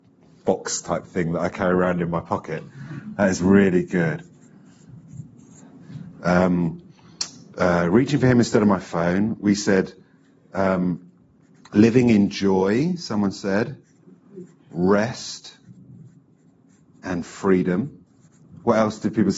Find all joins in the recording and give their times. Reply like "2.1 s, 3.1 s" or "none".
none